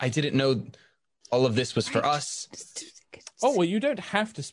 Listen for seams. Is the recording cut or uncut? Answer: uncut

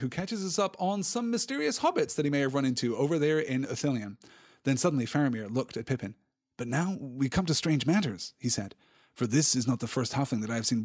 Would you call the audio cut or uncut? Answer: uncut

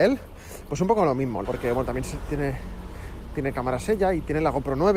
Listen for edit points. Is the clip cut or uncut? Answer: cut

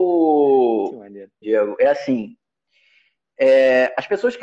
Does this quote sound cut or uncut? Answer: cut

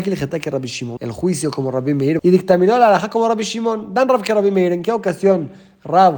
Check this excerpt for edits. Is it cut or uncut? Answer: cut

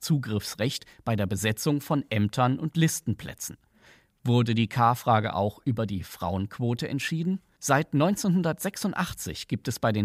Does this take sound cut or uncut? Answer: cut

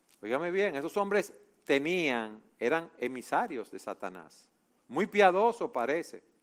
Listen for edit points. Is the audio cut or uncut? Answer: cut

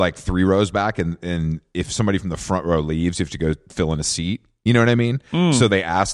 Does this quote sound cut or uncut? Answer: uncut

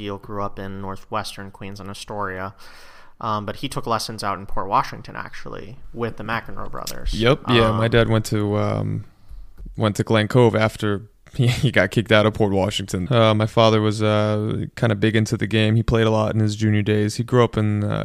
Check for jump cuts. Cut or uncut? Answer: cut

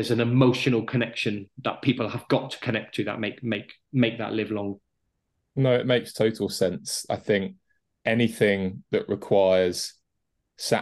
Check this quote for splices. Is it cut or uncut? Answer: uncut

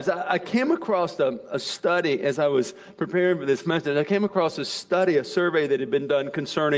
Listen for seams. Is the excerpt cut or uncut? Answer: uncut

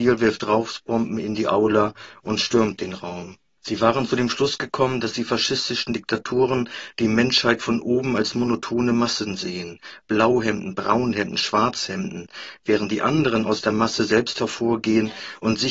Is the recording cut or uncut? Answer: cut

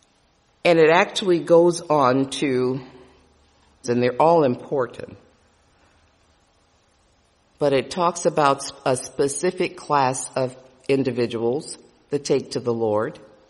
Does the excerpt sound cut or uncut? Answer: cut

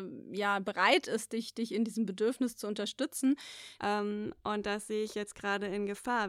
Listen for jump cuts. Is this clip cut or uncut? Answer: cut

